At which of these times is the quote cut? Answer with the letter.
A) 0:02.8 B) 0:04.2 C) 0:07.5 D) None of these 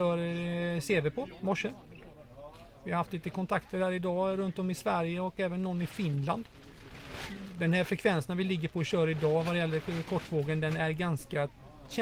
D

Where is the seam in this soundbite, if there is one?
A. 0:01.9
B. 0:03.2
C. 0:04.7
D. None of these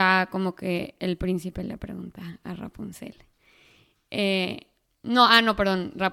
D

